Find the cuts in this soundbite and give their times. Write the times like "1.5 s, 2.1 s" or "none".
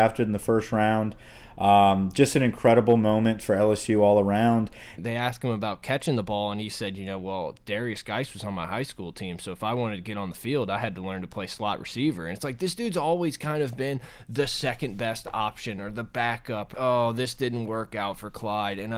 5.0 s, 16.7 s